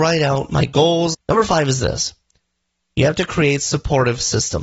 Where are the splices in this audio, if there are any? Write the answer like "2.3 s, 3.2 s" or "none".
1.1 s